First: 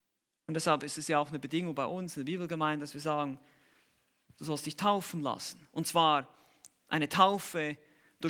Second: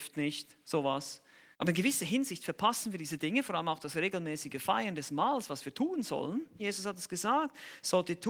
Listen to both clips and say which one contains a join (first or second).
second